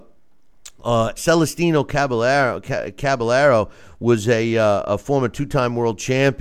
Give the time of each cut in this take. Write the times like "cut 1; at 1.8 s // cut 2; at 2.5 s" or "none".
cut 1; at 1.2 s